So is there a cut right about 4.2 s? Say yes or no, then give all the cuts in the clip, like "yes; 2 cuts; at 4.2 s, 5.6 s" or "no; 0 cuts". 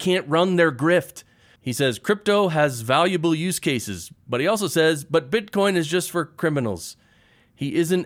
no; 1 cut; at 1.6 s